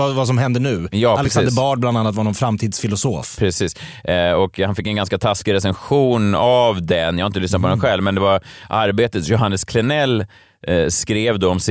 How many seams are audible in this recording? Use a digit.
0